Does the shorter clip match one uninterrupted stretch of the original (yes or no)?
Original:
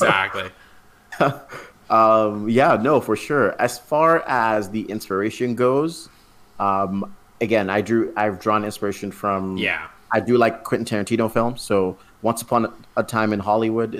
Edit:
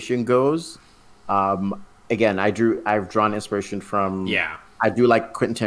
yes